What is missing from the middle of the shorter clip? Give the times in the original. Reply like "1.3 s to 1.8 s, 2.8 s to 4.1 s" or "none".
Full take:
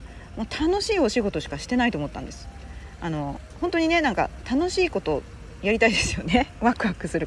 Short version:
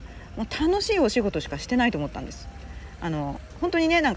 none